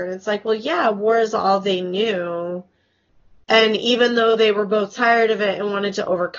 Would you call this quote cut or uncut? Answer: uncut